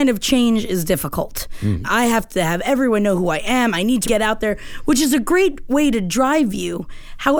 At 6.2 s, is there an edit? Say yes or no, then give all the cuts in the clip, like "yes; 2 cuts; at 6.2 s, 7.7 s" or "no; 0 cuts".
no; 2 cuts; at 1.8 s, 4.0 s